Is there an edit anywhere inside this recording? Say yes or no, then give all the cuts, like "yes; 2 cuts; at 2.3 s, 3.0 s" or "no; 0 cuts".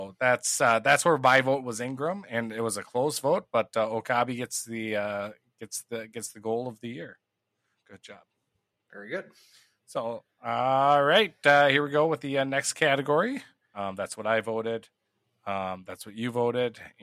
yes; 2 cuts; at 7.8 s, 13.7 s